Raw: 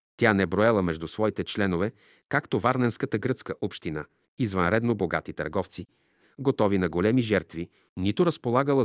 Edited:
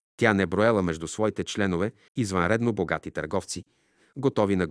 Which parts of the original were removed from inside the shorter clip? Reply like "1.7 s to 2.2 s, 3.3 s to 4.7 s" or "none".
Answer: 2.1 s to 4.3 s